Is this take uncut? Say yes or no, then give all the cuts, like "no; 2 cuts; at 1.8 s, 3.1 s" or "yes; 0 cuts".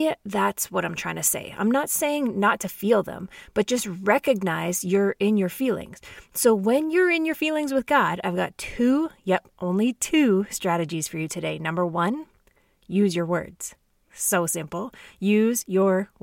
yes; 0 cuts